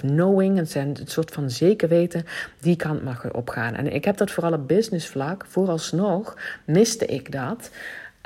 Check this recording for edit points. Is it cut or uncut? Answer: uncut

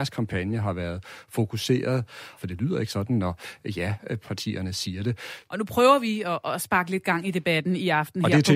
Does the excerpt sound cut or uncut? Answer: cut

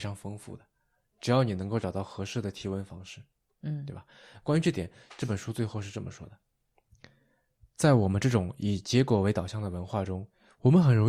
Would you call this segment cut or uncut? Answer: uncut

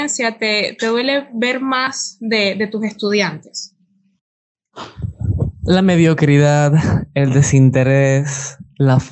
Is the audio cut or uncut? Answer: uncut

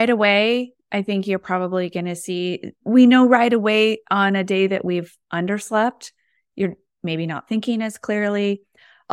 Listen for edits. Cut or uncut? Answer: cut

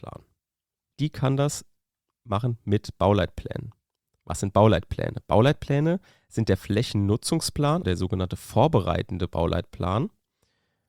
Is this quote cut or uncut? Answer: cut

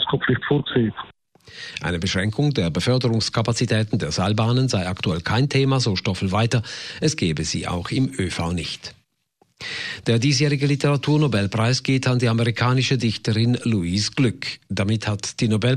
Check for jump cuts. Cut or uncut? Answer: uncut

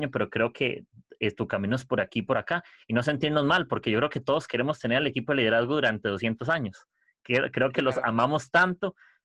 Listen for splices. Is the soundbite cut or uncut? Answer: uncut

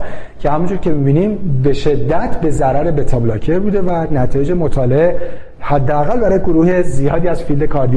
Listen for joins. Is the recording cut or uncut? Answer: uncut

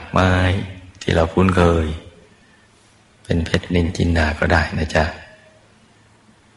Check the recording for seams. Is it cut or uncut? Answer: uncut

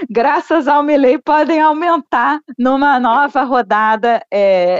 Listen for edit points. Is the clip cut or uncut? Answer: uncut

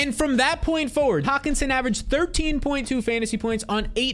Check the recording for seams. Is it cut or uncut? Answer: cut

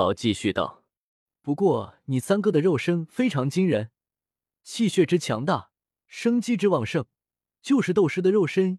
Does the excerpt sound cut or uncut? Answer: uncut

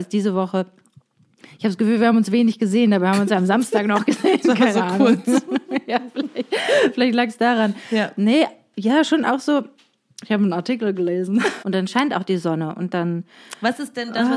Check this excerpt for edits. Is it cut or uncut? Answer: cut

